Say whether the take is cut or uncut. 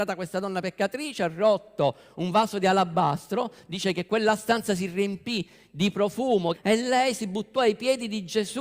cut